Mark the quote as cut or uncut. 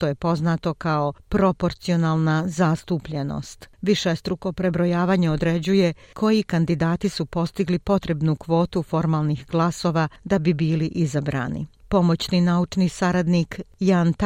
uncut